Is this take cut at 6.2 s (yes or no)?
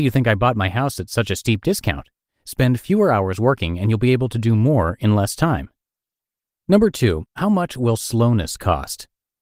no